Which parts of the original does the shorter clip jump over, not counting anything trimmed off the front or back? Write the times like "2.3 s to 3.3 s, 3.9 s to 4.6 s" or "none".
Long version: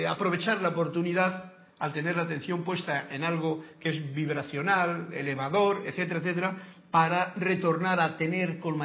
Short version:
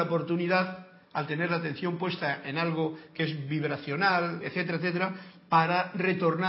5.1 s to 5.8 s